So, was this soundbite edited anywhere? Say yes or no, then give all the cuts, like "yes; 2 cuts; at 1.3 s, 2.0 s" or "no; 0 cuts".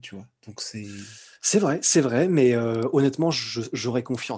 no; 0 cuts